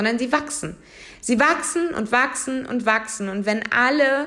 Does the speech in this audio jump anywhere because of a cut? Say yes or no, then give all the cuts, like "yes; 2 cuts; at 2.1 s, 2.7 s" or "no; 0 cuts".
no; 0 cuts